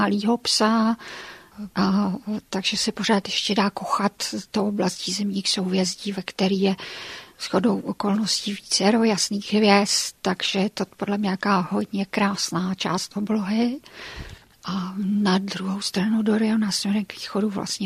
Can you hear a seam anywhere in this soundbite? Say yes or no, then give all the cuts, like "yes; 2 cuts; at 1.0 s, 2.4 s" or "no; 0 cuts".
yes; 2 cuts; at 1.7 s, 14.5 s